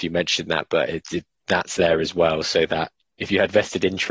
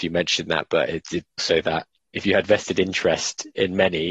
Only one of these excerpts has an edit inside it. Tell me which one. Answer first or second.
second